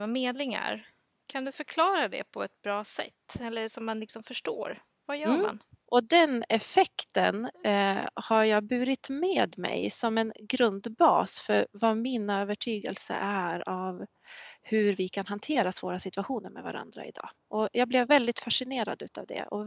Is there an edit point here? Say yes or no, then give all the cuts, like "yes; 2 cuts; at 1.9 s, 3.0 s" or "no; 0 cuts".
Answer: yes; 1 cut; at 5.9 s